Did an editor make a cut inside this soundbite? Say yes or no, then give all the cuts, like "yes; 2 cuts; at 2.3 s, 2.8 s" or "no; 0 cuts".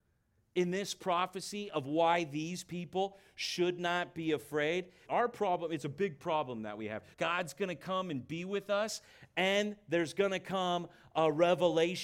yes; 2 cuts; at 5.1 s, 7.1 s